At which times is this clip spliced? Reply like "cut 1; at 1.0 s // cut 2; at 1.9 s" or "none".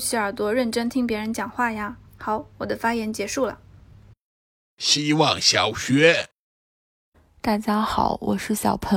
cut 1; at 2.1 s